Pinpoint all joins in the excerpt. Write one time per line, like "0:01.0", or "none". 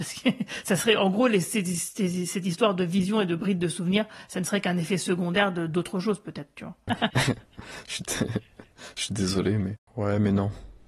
0:06.9
0:09.9